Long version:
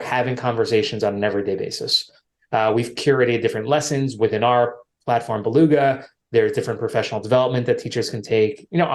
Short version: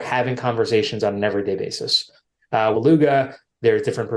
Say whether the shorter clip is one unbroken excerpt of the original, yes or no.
no